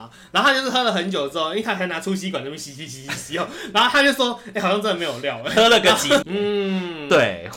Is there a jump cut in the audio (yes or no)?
yes